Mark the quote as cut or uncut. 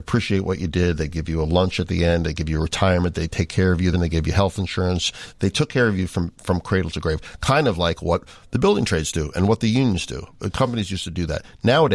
cut